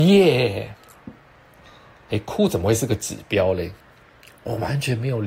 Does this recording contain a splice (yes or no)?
no